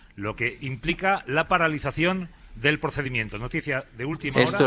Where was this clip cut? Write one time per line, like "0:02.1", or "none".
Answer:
none